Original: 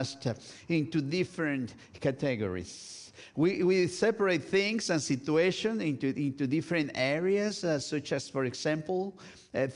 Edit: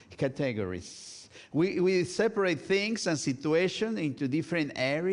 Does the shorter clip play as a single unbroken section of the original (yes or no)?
no